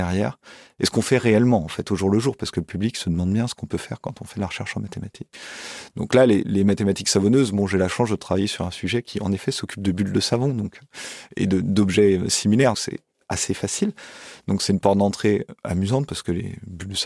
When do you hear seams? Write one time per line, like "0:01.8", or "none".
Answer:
0:12.7